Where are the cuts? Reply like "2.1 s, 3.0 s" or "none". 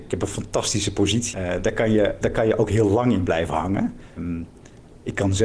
1.3 s, 4.2 s